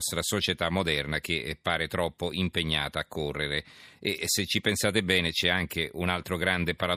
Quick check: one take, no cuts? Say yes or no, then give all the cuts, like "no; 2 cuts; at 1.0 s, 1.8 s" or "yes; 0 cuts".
yes; 0 cuts